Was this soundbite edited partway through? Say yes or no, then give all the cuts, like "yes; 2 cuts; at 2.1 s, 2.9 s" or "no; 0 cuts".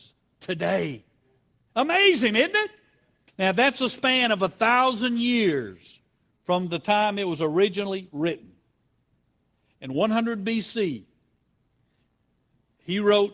yes; 1 cut; at 3.3 s